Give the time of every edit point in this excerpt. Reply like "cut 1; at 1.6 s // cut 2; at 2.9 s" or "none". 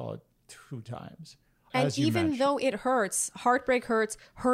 cut 1; at 1.7 s

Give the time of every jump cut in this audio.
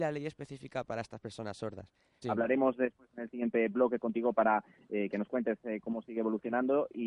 cut 1; at 2.2 s

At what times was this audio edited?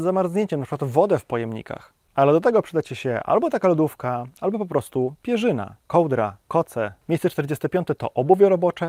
cut 1; at 7.0 s

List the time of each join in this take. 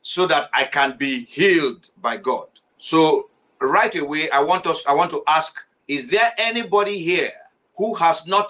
none

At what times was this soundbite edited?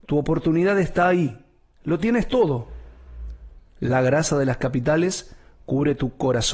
cut 1; at 3.6 s

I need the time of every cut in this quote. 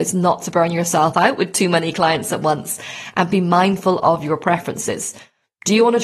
none

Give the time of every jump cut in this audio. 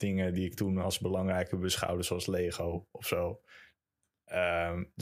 none

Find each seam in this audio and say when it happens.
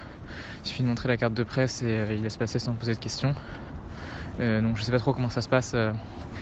none

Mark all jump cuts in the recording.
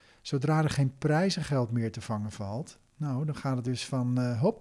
cut 1; at 2.9 s

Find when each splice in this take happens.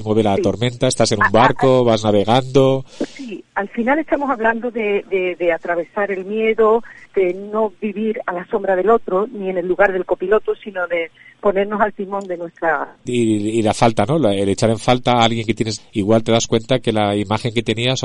cut 1; at 15.8 s

